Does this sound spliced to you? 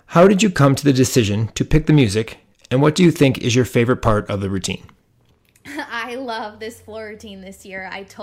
no; 0 cuts

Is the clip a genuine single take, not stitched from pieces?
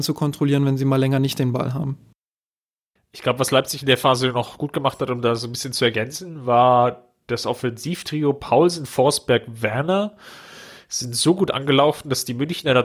yes; 0 cuts

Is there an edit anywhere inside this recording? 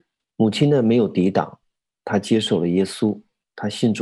no; 0 cuts

